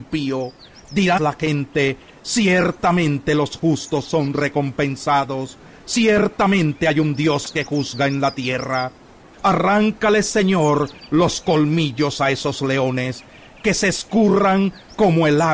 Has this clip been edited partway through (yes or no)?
yes